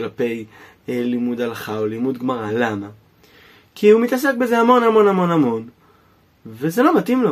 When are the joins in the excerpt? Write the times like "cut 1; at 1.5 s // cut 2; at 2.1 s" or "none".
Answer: none

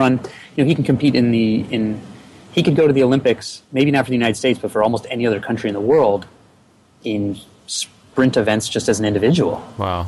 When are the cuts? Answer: none

